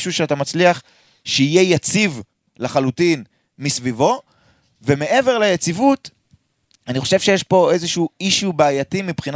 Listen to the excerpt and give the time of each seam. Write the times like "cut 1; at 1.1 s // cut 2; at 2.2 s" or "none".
none